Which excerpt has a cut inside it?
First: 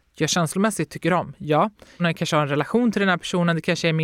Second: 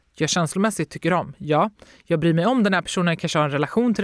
first; 1 cut; at 2.0 s

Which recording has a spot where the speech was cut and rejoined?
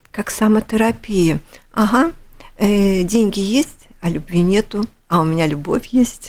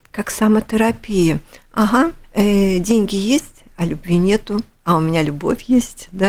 second; 1 cut; at 2.2 s

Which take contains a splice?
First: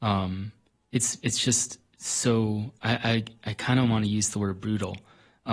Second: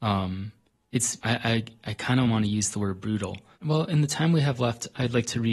second; 2 cuts; at 1.2 s, 3.5 s

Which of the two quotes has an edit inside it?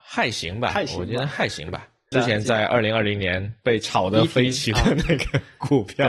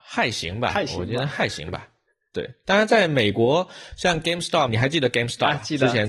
first; 1 cut; at 2.1 s

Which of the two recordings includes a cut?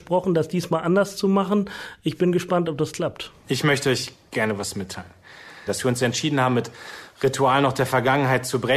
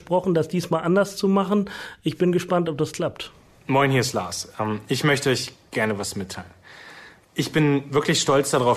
first; 2 cuts; at 3.4 s, 5.7 s

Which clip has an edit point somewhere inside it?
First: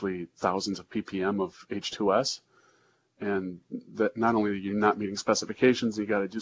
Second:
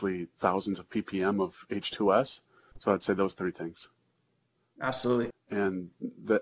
second; 2 cuts; at 2.7 s, 5.3 s

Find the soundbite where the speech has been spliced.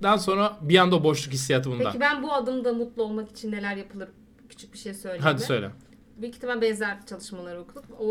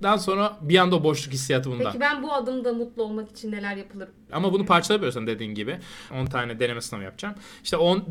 second; 2 cuts; at 4.3 s, 6.1 s

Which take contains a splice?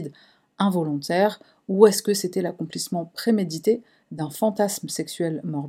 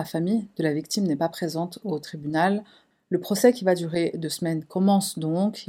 second; 1 cut; at 2.9 s

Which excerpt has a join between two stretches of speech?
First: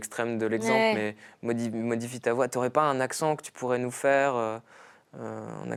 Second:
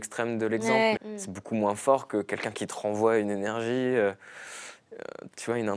second; 1 cut; at 1.0 s

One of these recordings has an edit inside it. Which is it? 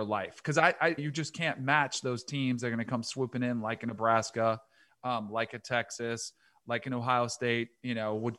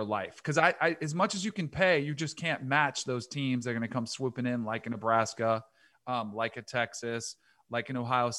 first; 1 cut; at 1.0 s

